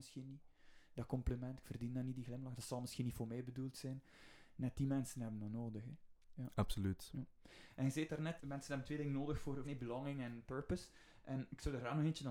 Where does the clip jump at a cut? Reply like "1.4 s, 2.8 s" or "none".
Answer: 8.4 s, 9.6 s